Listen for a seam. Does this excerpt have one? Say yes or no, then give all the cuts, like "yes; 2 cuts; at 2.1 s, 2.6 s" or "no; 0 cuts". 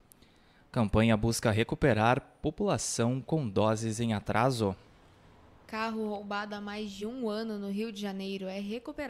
no; 0 cuts